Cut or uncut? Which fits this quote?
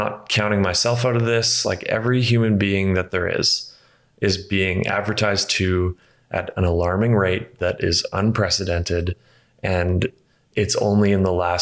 uncut